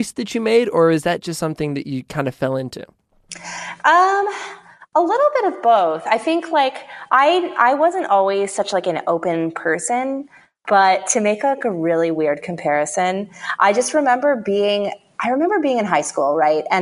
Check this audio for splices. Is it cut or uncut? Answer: uncut